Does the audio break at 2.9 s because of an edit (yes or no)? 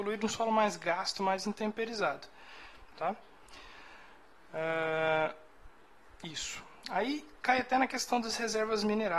yes